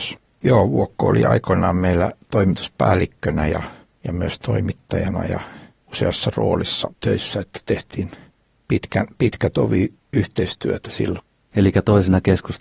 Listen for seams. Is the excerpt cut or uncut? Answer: cut